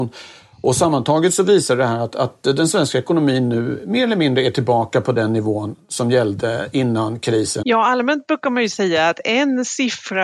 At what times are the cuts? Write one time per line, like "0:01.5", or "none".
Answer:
0:07.6